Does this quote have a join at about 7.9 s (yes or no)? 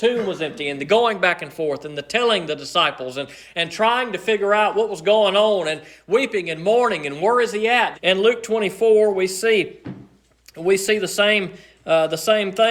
yes